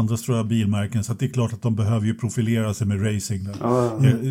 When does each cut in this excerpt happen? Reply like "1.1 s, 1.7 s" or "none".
none